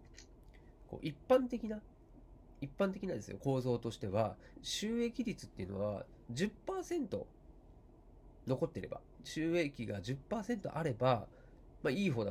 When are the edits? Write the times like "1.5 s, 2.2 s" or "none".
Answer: 4.5 s, 9.1 s